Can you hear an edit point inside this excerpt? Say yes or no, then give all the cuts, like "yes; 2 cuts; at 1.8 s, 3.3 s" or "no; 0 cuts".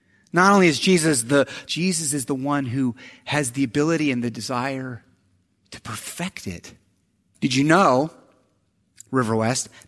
yes; 2 cuts; at 1.7 s, 7.3 s